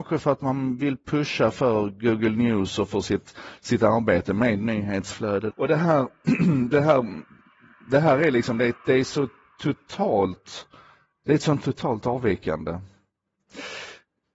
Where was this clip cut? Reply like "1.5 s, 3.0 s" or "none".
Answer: 5.5 s